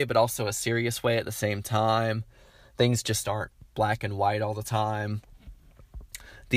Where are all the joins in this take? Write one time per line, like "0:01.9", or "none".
none